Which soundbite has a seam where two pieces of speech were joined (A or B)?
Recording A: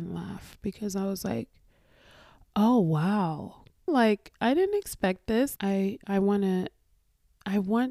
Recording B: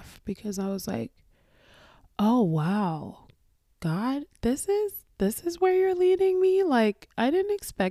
A